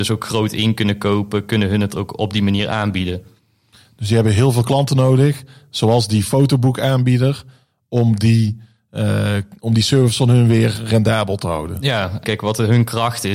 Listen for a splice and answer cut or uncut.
cut